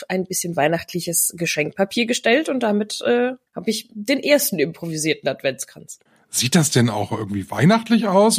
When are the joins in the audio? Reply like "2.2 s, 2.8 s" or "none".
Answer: 3.5 s